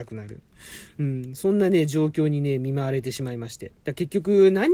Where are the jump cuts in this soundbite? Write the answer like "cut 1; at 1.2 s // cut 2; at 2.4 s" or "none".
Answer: cut 1; at 3.8 s